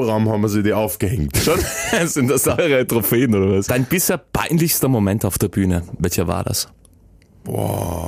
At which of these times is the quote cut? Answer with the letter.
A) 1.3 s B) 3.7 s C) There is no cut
B